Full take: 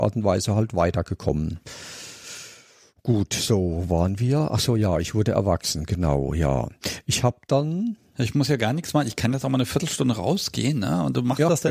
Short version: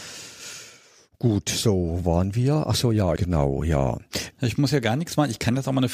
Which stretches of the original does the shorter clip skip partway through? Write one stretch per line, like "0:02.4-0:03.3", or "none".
0:05.0-0:05.9
0:07.0-0:08.1